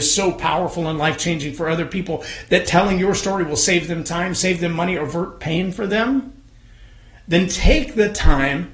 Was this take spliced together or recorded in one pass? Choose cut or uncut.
uncut